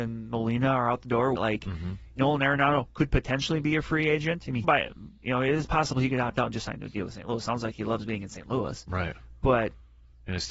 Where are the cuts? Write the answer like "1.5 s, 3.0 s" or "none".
1.4 s, 4.6 s

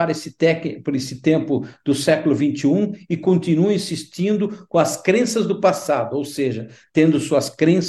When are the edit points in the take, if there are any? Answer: none

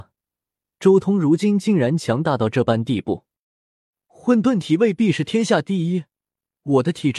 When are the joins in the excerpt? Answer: none

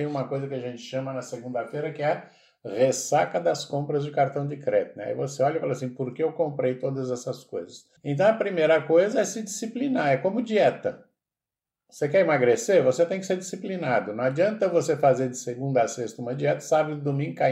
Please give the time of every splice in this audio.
8.0 s

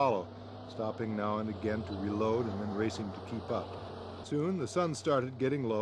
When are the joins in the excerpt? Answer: 4.2 s

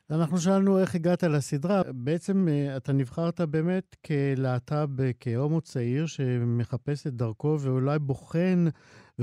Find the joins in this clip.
1.8 s

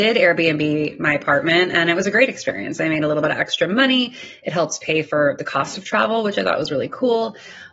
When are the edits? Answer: none

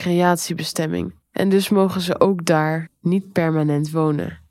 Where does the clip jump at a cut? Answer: 1.2 s

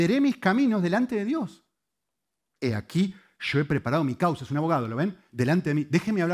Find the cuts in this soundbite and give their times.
2.6 s, 5.3 s

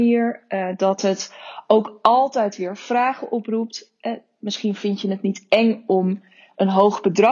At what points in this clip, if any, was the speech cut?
none

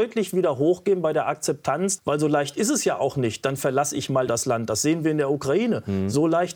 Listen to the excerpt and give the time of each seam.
2.0 s, 4.3 s

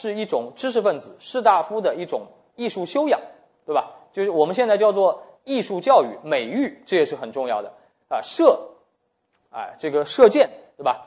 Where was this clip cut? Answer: none

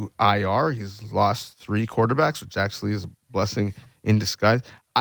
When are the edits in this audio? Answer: none

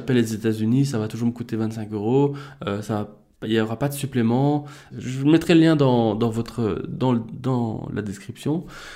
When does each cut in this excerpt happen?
4.9 s

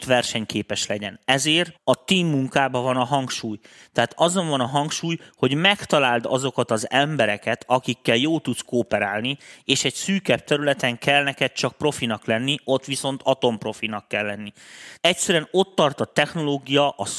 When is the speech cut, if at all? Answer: 1.7 s, 15.0 s

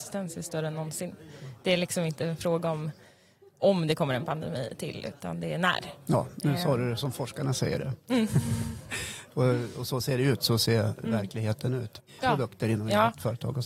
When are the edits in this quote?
12.2 s

